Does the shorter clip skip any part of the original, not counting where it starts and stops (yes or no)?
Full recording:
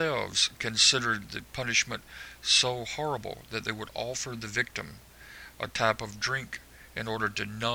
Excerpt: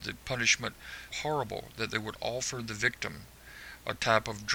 yes